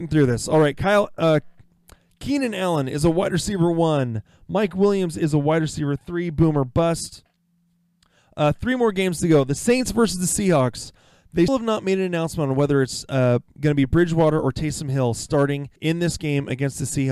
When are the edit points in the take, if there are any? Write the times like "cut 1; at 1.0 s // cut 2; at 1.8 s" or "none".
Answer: cut 1; at 11.5 s // cut 2; at 15.8 s